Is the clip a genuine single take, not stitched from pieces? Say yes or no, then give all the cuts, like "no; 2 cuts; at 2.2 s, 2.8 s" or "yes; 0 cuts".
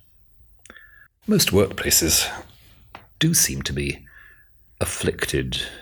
no; 2 cuts; at 1.1 s, 3.2 s